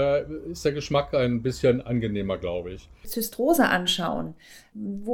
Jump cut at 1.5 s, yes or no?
no